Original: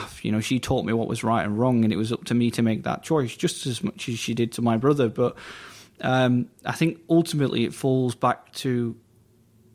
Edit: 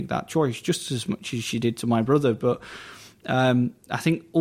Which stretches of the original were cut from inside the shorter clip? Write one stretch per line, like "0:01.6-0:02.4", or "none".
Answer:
none